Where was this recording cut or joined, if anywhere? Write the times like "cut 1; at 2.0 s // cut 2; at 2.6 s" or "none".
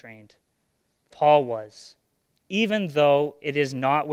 cut 1; at 1.1 s

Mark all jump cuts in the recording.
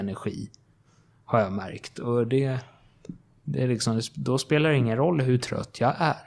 none

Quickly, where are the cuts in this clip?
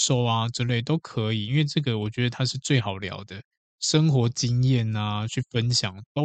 none

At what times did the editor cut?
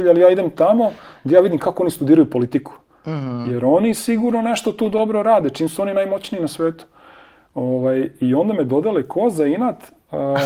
none

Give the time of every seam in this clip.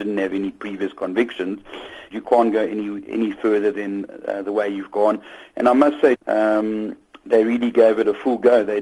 cut 1; at 2.1 s // cut 2; at 6.1 s

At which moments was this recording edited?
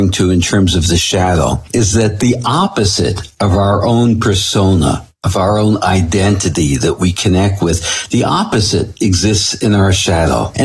none

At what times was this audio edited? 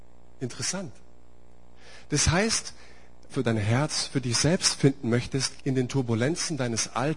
cut 1; at 3.3 s // cut 2; at 5.6 s

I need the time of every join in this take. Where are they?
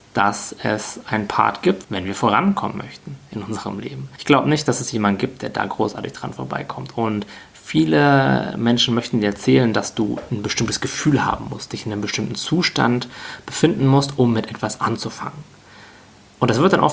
cut 1; at 1.8 s

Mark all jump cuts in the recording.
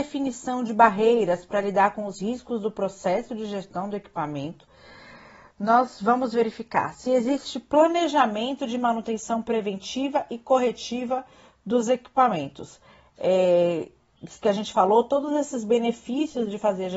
none

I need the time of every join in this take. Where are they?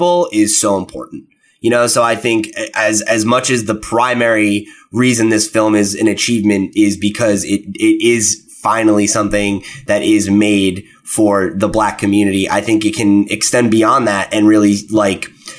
none

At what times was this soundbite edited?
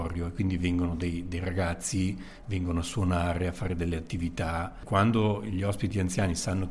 none

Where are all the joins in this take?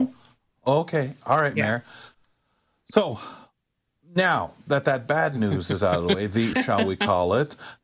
cut 1; at 6.5 s

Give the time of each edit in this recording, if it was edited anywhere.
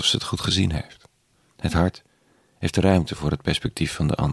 cut 1; at 1.5 s

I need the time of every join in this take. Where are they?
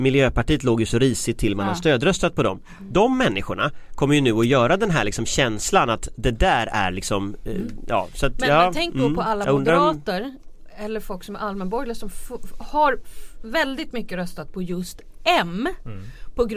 none

